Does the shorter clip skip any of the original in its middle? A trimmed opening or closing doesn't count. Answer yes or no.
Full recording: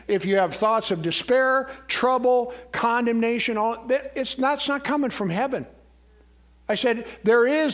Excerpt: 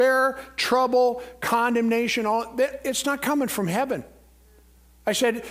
yes